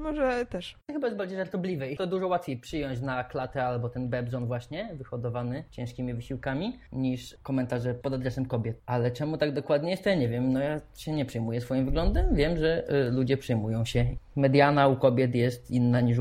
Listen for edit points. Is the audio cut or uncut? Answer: uncut